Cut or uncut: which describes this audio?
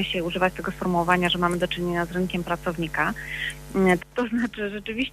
cut